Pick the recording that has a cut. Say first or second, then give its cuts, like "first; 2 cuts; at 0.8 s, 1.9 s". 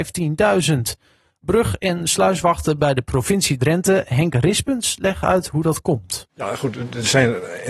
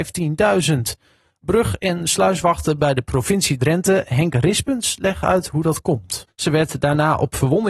second; 1 cut; at 6.3 s